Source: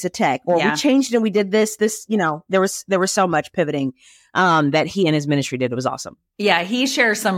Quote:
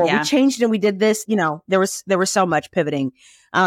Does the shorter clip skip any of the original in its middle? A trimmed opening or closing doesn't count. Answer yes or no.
yes